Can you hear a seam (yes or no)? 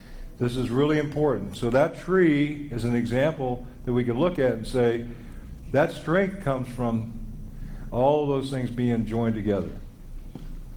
no